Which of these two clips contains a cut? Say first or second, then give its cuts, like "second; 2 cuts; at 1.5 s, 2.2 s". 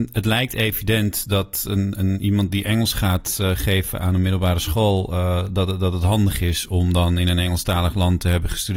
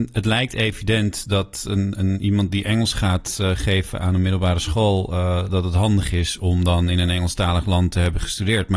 second; 1 cut; at 5.5 s